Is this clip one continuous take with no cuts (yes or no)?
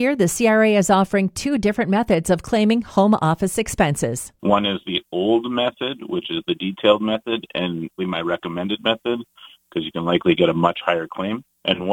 no